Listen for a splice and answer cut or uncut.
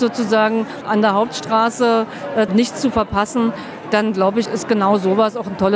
cut